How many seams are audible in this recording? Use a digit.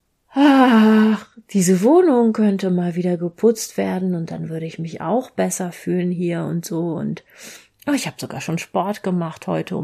0